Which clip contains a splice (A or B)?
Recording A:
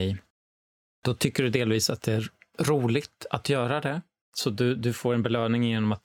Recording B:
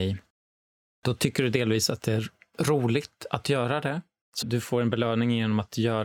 B